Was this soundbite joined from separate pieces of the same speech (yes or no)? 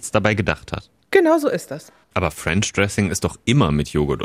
yes